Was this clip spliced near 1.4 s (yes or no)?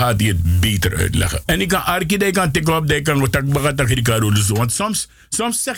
yes